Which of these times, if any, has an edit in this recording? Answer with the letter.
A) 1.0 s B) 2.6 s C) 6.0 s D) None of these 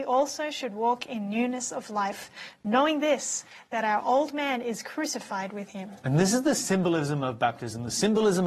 D